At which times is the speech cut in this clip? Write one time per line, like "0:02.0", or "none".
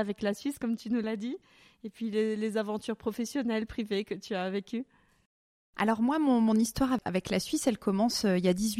none